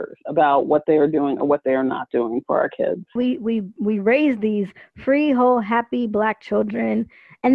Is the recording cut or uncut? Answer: cut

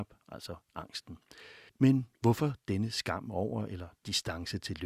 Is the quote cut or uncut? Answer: cut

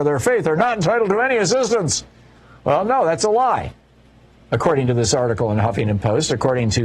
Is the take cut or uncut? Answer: cut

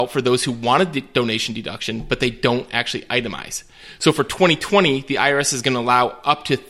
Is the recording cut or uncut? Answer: uncut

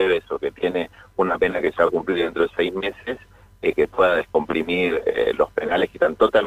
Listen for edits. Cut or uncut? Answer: uncut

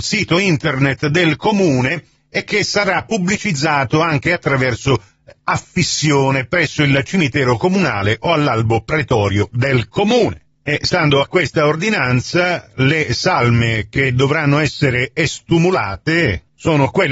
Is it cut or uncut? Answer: uncut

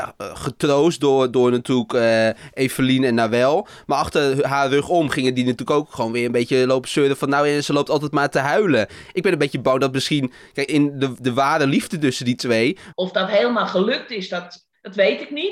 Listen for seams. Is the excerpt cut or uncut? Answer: cut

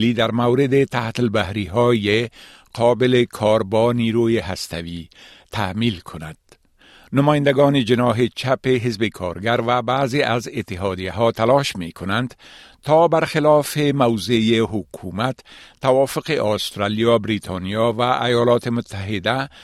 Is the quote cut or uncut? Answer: uncut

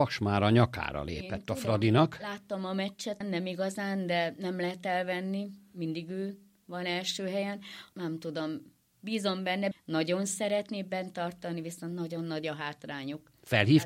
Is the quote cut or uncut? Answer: cut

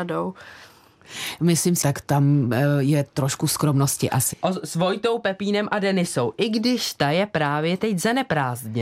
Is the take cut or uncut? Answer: cut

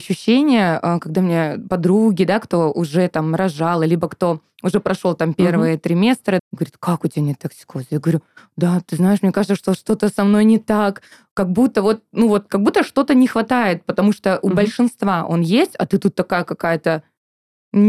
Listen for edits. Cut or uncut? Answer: cut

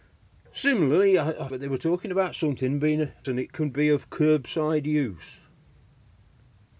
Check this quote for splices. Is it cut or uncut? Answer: cut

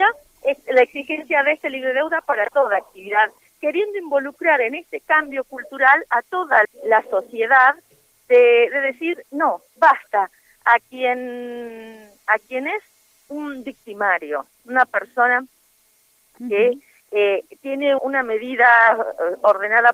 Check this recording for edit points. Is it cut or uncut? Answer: cut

